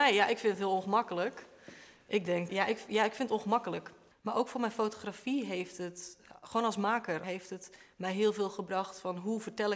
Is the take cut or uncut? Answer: cut